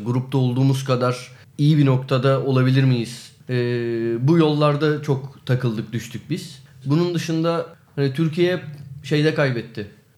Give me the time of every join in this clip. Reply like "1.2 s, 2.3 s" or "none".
3.4 s, 6.8 s